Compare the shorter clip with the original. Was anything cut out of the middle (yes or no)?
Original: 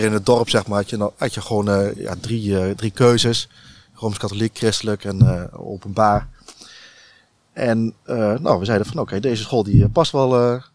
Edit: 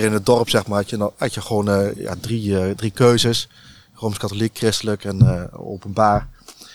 no